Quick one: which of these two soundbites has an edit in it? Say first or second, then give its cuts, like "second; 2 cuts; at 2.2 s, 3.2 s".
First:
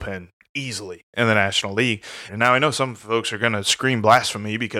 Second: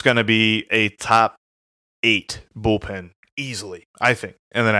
first; 2 cuts; at 1.1 s, 2.3 s